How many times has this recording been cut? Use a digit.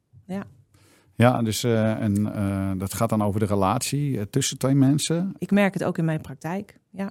1